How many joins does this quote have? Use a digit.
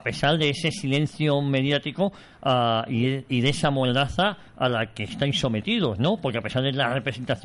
0